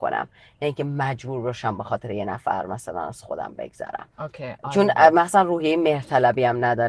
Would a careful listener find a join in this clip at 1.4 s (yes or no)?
no